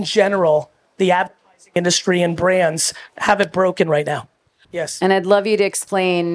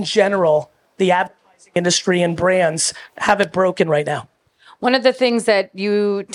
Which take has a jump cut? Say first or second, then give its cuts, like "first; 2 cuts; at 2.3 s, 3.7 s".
first; 1 cut; at 4.6 s